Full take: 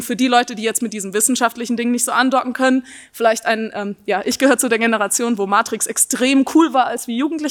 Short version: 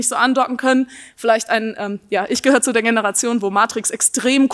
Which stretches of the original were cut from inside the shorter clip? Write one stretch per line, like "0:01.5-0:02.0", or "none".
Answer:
none